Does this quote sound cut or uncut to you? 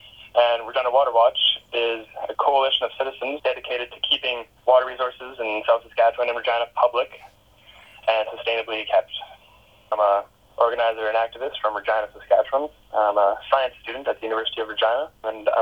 cut